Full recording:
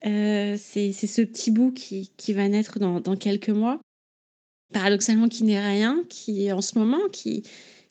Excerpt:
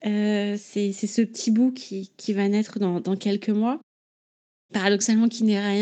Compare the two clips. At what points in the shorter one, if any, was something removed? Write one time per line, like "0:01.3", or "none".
none